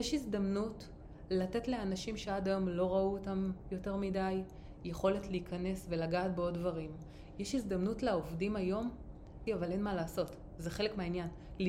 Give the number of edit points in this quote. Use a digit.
1